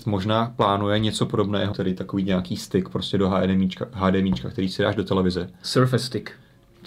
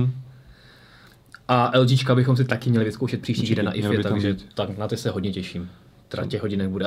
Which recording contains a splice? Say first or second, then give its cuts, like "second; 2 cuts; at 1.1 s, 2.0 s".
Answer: first; 1 cut; at 1.7 s